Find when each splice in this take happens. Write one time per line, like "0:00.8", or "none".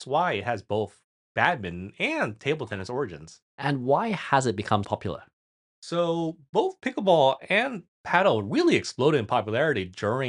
0:04.8